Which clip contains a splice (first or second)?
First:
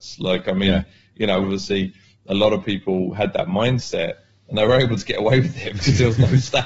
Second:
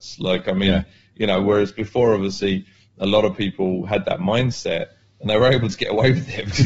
first